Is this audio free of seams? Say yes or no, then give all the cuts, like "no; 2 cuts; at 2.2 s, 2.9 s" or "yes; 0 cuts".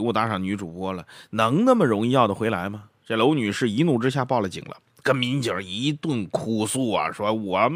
yes; 0 cuts